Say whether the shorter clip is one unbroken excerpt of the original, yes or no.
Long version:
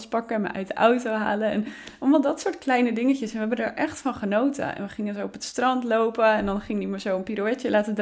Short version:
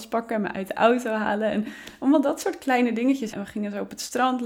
no